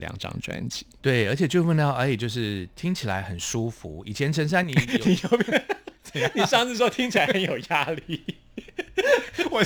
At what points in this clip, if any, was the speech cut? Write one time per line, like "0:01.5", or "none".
none